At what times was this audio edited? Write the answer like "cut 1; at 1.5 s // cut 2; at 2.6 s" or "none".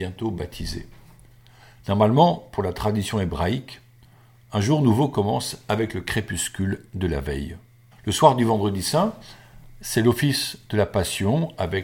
cut 1; at 7.9 s